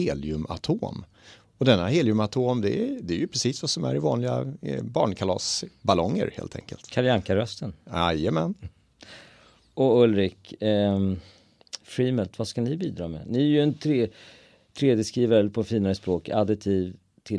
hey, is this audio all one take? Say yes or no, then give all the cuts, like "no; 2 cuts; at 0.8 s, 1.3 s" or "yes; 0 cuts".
yes; 0 cuts